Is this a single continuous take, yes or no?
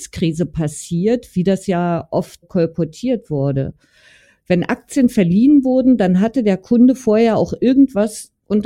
no